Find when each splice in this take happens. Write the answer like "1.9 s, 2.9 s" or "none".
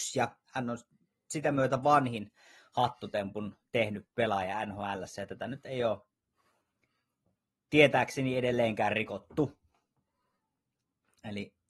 none